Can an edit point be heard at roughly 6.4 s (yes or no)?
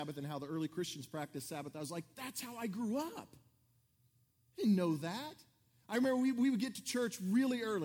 no